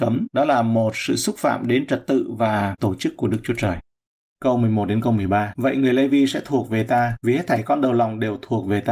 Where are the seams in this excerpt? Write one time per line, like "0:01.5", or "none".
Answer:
0:04.4
0:05.5